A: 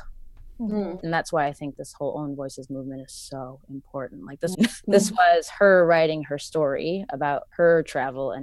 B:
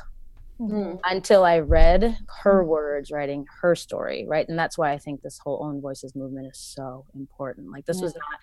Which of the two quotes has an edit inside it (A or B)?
A